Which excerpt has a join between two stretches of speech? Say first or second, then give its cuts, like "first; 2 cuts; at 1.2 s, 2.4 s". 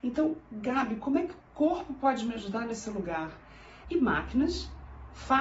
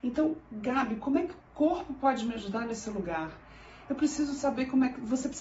first; 1 cut; at 3.8 s